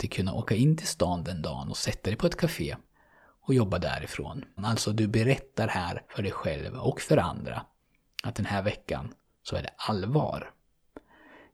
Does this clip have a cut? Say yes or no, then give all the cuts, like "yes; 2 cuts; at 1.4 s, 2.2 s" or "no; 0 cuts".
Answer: yes; 2 cuts; at 4.6 s, 6.1 s